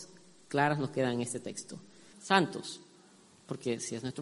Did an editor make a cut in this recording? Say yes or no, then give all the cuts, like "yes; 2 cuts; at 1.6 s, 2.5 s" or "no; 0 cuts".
yes; 1 cut; at 2.1 s